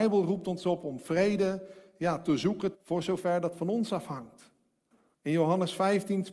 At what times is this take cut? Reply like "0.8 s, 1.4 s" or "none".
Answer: 2.7 s, 5.1 s